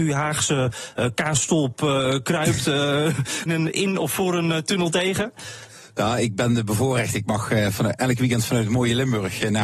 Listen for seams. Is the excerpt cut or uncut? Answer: cut